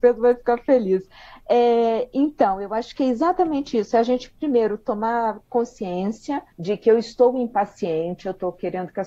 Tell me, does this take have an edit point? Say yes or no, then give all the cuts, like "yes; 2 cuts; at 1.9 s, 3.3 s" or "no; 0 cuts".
yes; 1 cut; at 6.5 s